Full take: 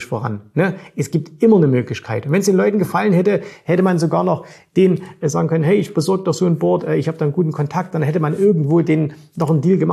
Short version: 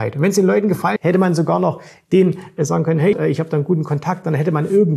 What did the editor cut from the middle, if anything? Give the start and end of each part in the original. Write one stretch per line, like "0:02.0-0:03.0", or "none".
0:03.1-0:03.6
0:05.8-0:06.8